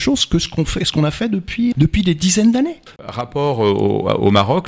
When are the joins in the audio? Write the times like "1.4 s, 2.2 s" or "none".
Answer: 1.7 s, 3.0 s